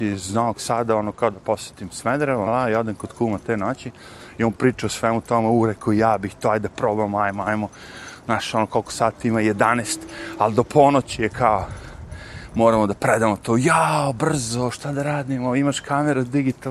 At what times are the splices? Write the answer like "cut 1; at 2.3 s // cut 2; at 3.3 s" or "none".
cut 1; at 2.5 s